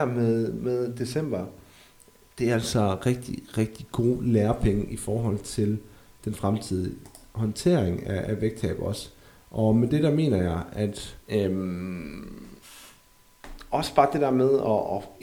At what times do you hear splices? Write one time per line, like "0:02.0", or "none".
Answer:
0:11.2

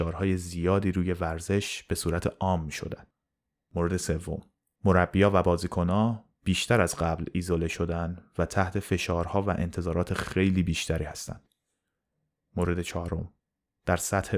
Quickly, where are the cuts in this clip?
none

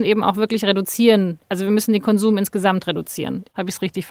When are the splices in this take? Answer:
none

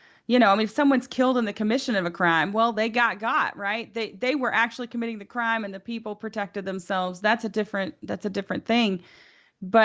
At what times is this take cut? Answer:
none

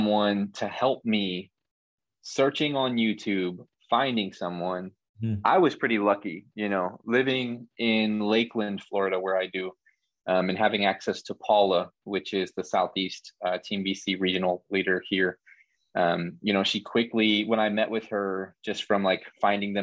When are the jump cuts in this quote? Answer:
none

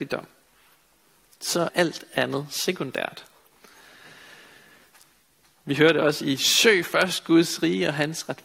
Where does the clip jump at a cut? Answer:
0:01.7

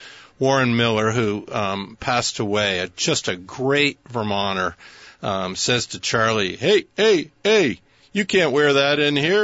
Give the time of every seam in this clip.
none

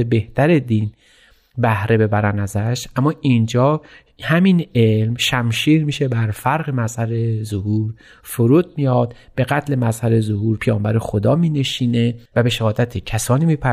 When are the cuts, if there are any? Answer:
0:12.3

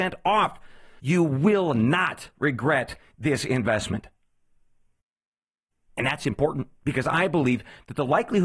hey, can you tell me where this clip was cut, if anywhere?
0:01.0
0:05.9

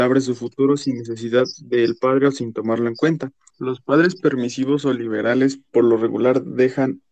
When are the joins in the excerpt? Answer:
0:03.5

